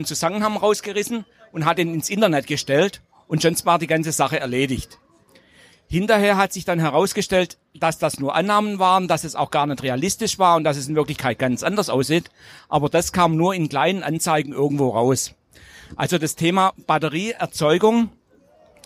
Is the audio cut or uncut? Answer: uncut